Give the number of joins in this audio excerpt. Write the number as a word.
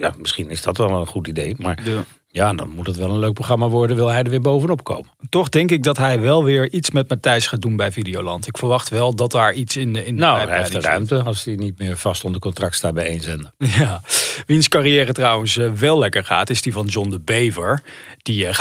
zero